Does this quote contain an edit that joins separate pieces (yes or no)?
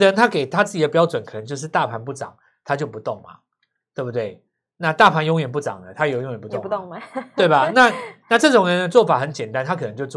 no